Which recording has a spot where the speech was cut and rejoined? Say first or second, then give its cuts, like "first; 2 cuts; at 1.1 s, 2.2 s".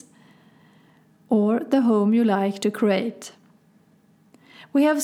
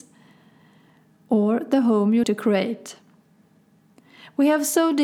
second; 1 cut; at 2.2 s